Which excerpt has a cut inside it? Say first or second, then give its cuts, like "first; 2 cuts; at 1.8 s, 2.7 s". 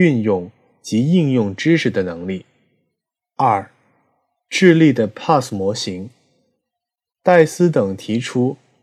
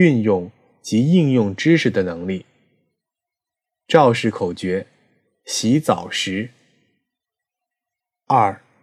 first; 1 cut; at 3.2 s